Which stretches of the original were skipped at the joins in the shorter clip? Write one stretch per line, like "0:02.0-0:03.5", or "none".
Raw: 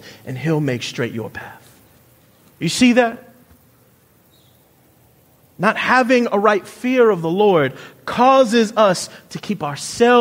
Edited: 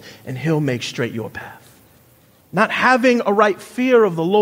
0:02.4-0:05.5